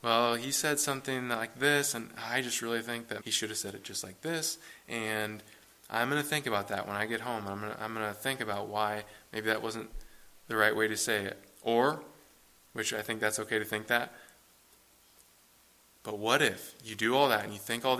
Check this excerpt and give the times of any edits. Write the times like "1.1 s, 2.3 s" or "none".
3.2 s